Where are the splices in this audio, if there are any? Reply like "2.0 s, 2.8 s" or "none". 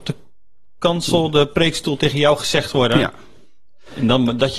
none